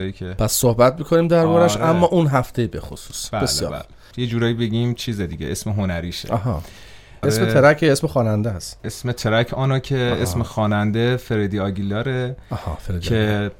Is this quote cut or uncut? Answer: cut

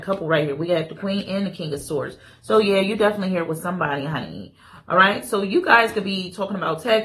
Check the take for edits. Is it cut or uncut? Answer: uncut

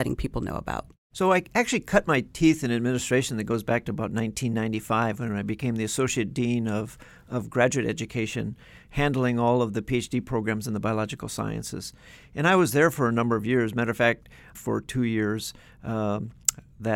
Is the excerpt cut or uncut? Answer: cut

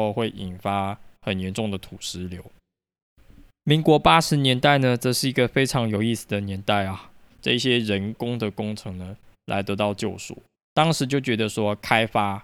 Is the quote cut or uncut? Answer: cut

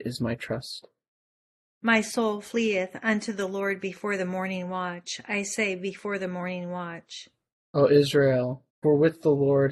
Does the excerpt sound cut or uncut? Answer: cut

